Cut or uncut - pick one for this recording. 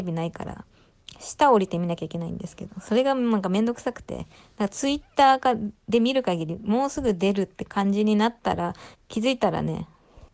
cut